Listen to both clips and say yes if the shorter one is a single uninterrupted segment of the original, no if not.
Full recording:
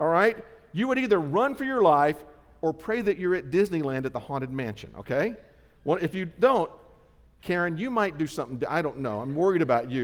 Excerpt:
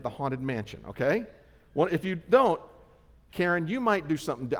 yes